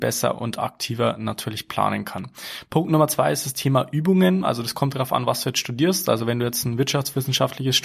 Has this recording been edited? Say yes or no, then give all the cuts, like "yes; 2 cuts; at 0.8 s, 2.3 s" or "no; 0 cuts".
no; 0 cuts